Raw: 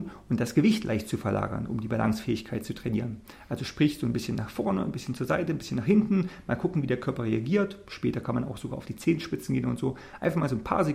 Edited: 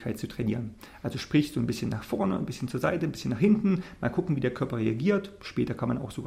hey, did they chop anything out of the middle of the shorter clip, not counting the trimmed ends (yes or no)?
no